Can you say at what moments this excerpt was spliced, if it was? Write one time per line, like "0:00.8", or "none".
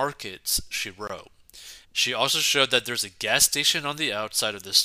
0:01.8